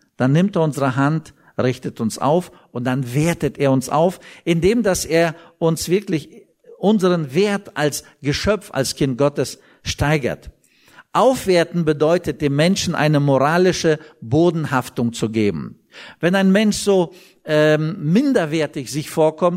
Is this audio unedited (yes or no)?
yes